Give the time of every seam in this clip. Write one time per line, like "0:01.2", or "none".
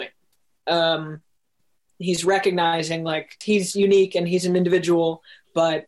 0:03.4